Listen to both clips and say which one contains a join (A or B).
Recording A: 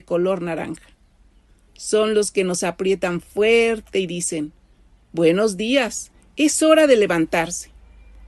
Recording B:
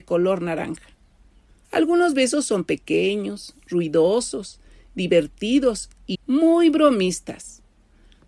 B